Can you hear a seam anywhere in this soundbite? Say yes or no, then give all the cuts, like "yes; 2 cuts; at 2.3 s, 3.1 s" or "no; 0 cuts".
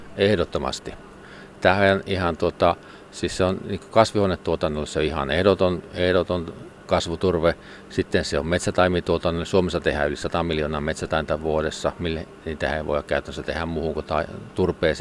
no; 0 cuts